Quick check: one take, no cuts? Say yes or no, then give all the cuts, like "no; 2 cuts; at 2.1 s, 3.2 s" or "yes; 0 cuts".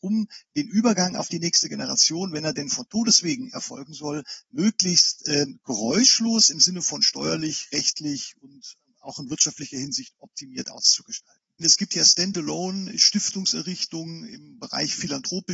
no; 1 cut; at 11.6 s